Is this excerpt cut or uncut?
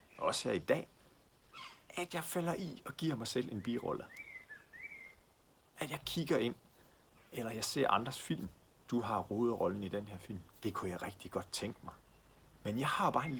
cut